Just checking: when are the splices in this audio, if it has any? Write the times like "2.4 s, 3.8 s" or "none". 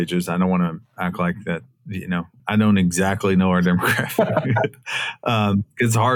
2.4 s